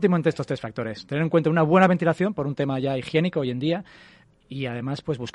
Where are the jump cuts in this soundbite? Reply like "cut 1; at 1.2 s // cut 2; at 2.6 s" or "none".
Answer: cut 1; at 4.3 s